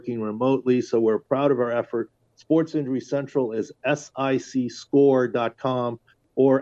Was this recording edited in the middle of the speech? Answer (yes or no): no